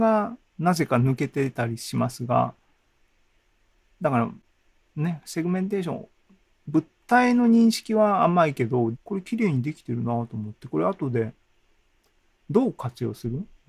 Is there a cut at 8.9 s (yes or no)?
yes